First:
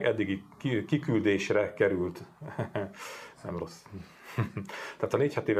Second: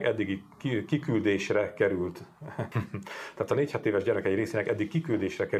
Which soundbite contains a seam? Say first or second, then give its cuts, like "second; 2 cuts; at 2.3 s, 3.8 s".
second; 1 cut; at 2.7 s